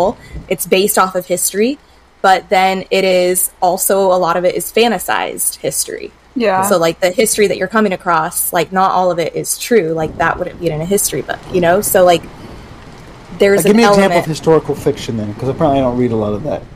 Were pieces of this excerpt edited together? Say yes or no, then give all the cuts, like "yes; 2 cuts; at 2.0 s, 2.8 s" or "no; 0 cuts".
no; 0 cuts